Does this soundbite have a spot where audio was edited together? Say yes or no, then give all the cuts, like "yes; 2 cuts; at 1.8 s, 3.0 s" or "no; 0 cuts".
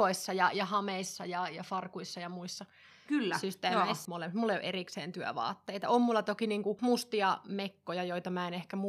yes; 1 cut; at 4.1 s